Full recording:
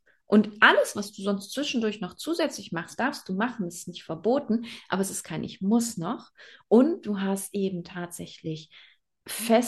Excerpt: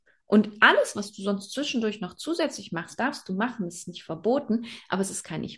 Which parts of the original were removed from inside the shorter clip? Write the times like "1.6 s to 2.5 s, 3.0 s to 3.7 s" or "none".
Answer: none